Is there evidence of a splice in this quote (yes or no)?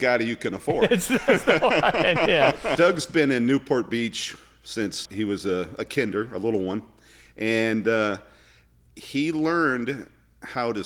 yes